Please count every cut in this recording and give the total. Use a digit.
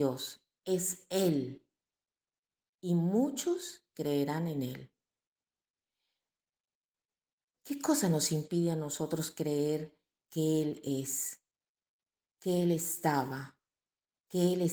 0